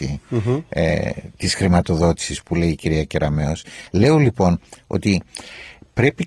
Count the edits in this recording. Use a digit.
0